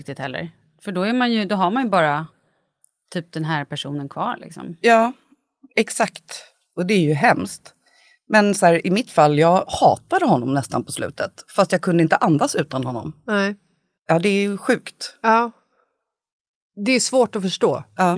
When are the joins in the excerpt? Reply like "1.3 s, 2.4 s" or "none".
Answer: none